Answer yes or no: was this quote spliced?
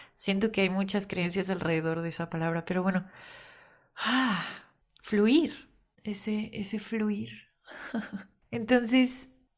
no